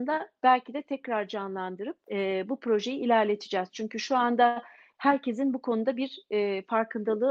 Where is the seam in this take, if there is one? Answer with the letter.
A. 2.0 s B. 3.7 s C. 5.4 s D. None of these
A